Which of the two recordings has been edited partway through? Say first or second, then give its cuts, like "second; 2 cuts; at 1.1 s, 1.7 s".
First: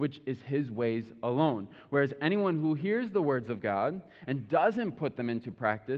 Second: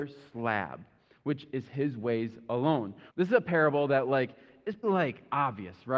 second; 2 cuts; at 3.1 s, 4.8 s